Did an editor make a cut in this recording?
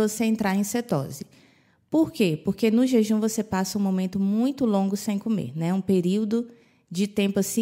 no; 0 cuts

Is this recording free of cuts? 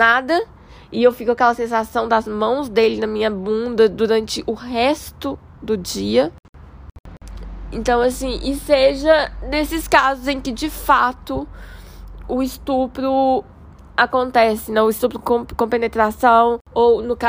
yes; 0 cuts

